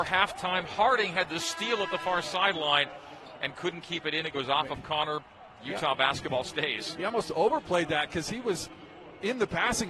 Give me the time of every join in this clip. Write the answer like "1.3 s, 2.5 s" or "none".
none

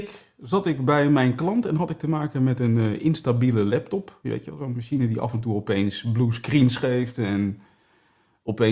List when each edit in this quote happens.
none

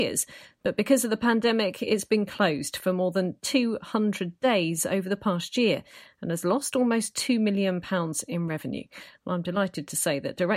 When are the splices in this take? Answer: 9.2 s

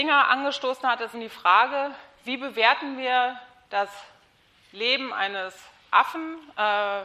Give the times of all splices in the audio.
1.1 s

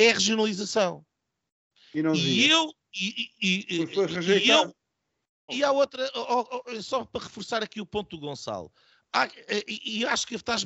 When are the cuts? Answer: 5.5 s

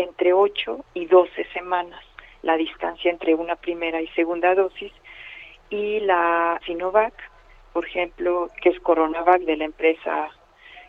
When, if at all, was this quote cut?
6.6 s

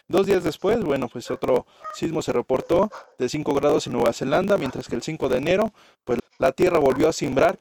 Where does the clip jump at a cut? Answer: 6.2 s

